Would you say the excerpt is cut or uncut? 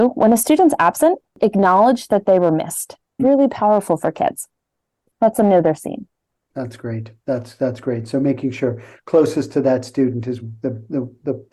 cut